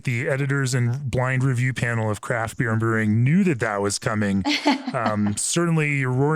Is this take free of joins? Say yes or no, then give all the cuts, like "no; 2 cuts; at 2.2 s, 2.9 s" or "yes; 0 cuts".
yes; 0 cuts